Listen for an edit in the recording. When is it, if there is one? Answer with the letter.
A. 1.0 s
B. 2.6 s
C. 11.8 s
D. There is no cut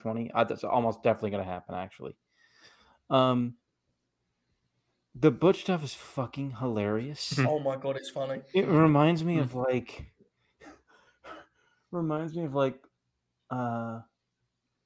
D